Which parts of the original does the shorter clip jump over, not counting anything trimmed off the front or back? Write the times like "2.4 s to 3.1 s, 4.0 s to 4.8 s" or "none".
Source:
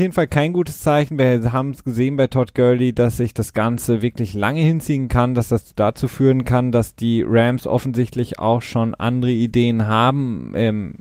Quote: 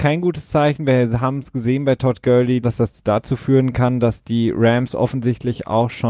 2.9 s to 5.3 s